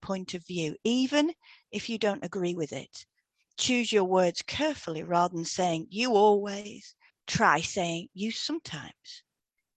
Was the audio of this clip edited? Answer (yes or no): no